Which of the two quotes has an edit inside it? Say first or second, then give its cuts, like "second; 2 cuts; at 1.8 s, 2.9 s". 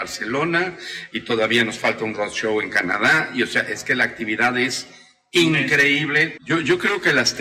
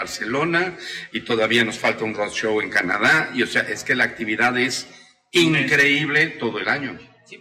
first; 1 cut; at 6.4 s